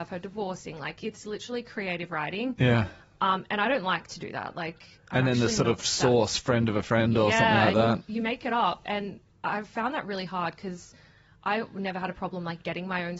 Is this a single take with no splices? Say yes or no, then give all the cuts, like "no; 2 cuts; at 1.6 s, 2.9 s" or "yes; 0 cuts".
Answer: yes; 0 cuts